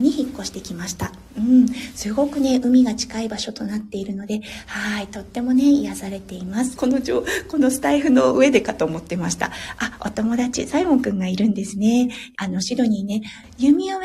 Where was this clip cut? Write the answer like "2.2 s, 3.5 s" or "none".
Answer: 6.8 s, 12.3 s